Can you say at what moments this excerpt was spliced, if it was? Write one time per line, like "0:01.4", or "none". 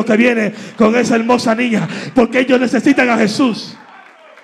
0:02.1